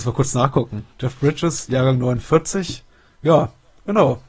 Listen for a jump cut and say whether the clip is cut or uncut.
cut